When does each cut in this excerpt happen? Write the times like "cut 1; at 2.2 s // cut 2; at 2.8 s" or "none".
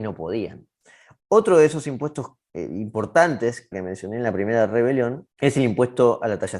cut 1; at 1.2 s // cut 2; at 3.7 s